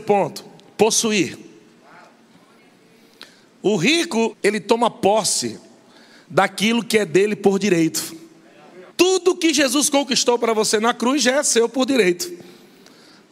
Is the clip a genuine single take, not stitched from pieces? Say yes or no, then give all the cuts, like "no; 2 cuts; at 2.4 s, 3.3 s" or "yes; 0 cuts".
no; 2 cuts; at 4.3 s, 8.9 s